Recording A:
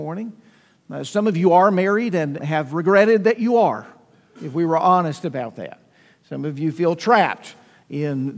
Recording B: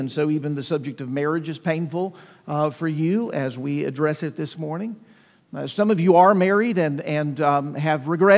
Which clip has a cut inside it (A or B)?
A